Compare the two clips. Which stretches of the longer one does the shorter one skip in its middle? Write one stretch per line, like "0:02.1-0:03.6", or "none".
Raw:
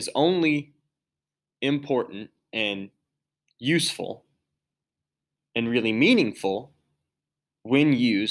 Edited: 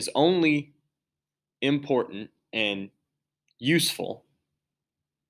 none